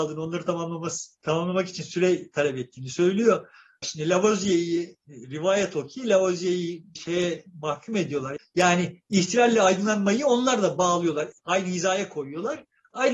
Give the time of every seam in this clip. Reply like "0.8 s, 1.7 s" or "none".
3.8 s, 8.4 s